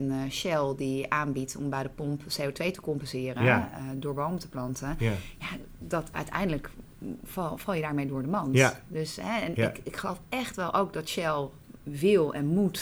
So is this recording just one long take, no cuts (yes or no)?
yes